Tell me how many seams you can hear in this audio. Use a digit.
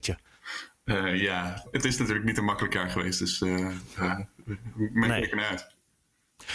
0